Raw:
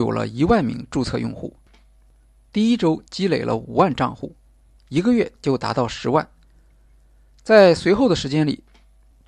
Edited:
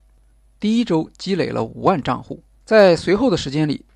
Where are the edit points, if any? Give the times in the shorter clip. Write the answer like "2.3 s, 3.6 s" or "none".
2.6 s